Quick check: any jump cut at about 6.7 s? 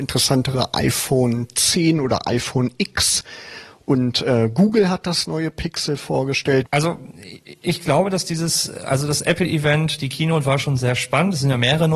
yes; 1 cut; at 6.7 s

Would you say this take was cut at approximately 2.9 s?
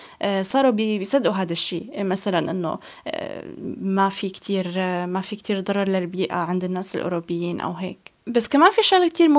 no; 1 cut; at 8.2 s

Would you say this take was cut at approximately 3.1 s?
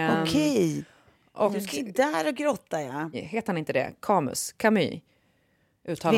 yes; 1 cut; at 3.1 s

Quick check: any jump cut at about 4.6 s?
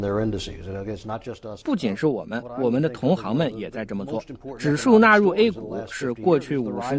no; 1 cut; at 1.6 s

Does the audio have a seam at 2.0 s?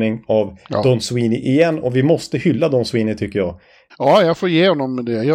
no; 1 cut; at 3.9 s

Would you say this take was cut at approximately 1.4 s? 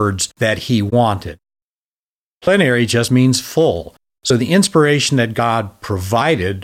no; 0 cuts

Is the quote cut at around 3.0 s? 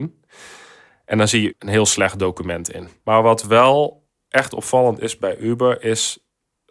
yes; 2 cuts; at 1.5 s, 3.0 s

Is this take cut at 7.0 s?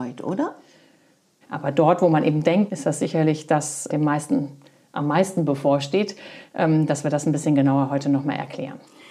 no; 3 cuts; at 1.4 s, 2.7 s, 3.9 s

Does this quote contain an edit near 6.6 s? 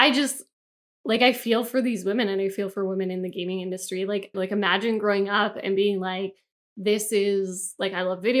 no; 1 cut; at 4.3 s

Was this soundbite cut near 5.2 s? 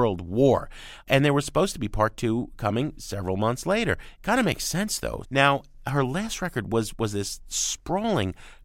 yes; 2 cuts; at 4.1 s, 5.2 s

